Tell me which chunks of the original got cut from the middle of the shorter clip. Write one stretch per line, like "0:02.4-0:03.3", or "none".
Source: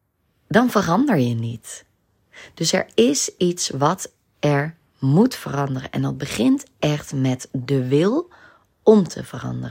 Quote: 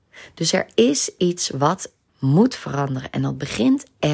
0:04.3-0:04.9

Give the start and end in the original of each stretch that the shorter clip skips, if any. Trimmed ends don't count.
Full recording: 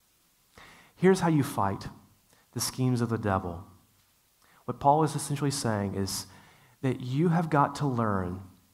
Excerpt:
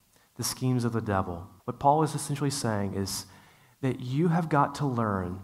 0:03.8-0:04.6

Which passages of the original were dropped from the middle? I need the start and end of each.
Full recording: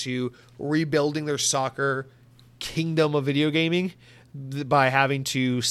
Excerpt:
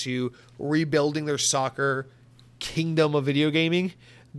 none

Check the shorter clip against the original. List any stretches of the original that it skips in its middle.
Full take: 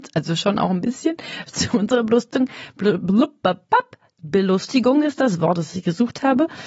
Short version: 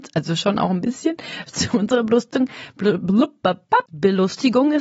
0:03.9-0:04.2

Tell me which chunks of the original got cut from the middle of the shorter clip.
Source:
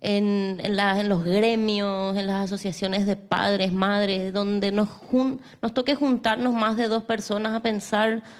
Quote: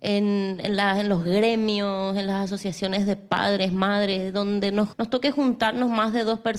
0:04.9-0:05.6

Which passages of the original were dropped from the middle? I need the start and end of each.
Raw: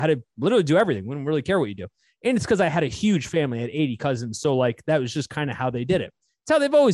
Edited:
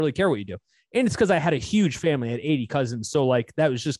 none

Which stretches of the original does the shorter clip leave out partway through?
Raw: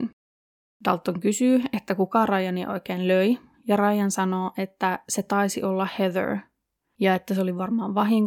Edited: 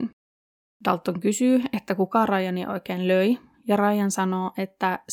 none

